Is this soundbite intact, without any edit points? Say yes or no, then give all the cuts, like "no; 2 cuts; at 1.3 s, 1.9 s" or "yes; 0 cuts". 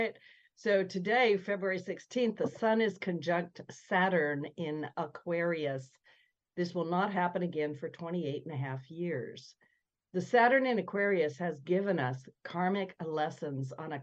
yes; 0 cuts